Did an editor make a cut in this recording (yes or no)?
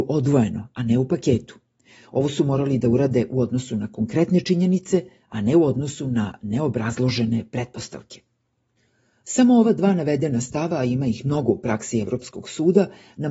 no